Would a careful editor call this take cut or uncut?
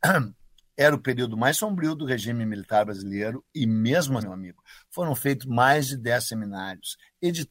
cut